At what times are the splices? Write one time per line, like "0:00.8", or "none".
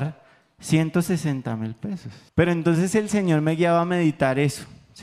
0:02.3